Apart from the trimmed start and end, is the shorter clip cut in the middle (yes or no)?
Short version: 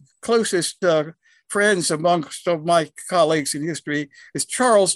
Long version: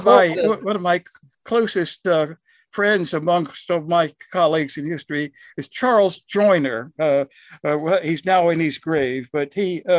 no